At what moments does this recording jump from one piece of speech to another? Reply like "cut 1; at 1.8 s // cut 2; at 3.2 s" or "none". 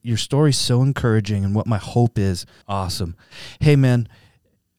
cut 1; at 2.6 s